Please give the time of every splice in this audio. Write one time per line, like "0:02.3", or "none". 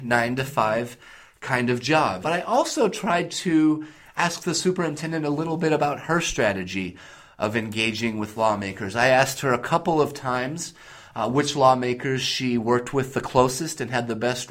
0:02.2